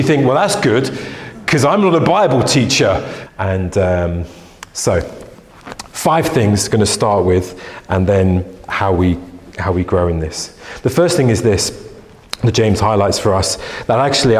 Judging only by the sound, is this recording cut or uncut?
cut